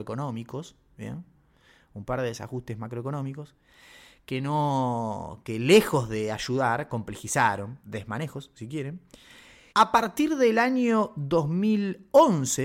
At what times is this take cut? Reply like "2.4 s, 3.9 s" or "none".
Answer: 7.8 s, 9.7 s

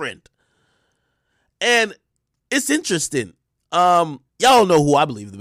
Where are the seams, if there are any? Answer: 4.3 s

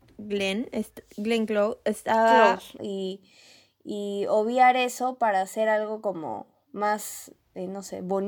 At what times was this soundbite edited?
2.8 s

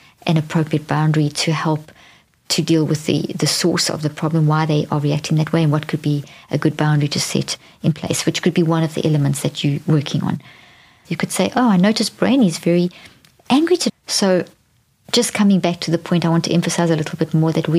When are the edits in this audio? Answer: 11.0 s, 13.9 s

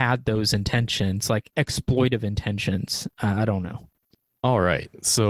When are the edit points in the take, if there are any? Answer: none

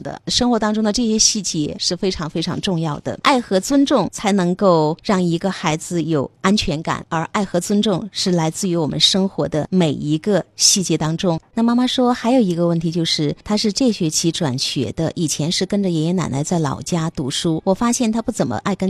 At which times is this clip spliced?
none

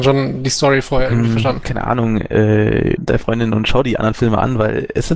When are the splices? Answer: 1.6 s, 3.0 s

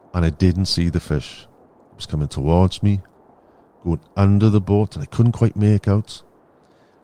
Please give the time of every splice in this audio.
none

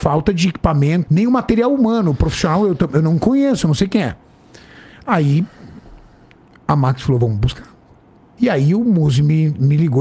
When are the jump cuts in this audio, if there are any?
1.1 s, 8.4 s

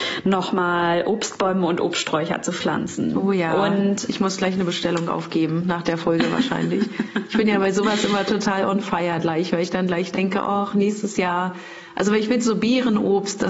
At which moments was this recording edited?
none

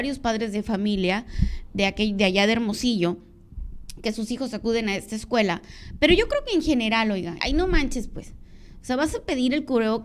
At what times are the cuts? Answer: 7.4 s

